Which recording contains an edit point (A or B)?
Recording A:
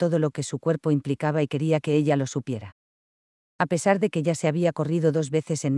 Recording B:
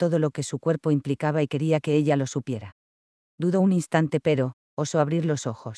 B